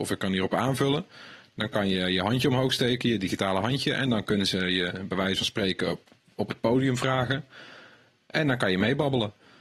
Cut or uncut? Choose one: uncut